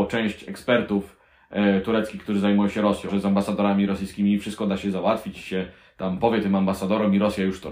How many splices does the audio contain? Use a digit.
1